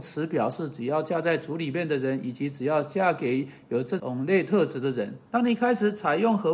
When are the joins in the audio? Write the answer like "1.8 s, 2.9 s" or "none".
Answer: 4.0 s, 5.3 s